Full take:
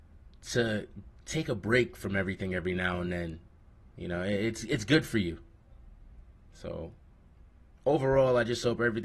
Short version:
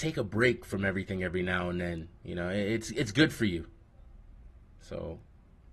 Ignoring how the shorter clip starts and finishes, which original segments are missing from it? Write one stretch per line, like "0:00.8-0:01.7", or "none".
0:03.5-0:03.9